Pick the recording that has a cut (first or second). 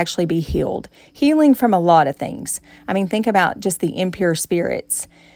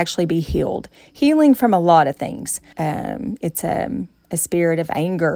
second